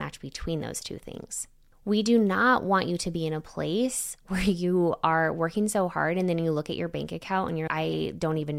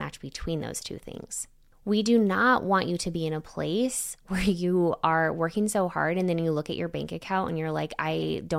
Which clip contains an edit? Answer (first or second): first